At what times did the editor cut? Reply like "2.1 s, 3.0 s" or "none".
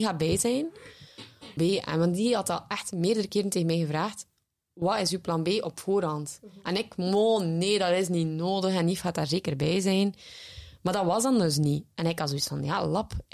1.6 s